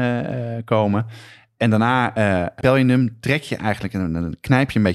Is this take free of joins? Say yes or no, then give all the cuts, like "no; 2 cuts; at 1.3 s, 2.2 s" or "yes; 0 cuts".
no; 1 cut; at 2.6 s